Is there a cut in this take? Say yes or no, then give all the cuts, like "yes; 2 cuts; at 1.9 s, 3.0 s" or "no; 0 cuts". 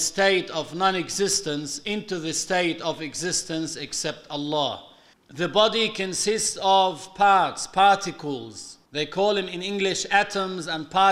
yes; 2 cuts; at 5.1 s, 8.9 s